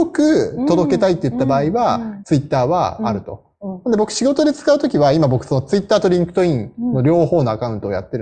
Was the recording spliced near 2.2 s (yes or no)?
yes